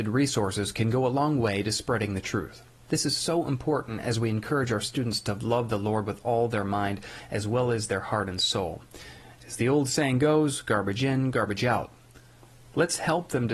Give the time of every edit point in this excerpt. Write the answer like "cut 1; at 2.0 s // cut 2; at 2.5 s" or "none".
none